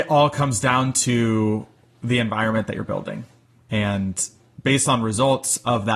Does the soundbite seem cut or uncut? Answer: uncut